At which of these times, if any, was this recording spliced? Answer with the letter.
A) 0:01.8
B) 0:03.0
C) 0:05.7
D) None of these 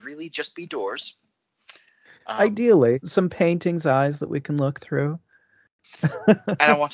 B